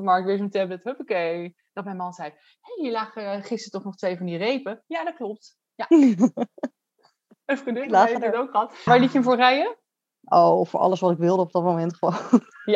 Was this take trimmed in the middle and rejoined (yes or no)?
yes